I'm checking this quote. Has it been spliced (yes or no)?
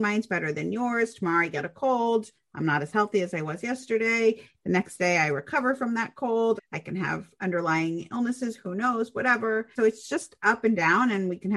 yes